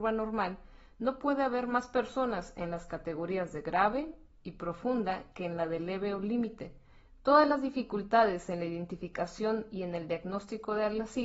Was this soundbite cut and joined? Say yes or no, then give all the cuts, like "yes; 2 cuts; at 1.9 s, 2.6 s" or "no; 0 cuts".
yes; 1 cut; at 7.1 s